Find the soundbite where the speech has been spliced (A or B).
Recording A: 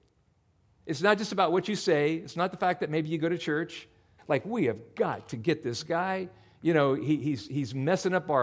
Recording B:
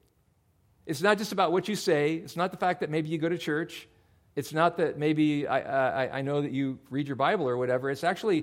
A